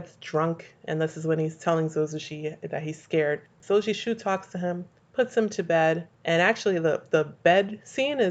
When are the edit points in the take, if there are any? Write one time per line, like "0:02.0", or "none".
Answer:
none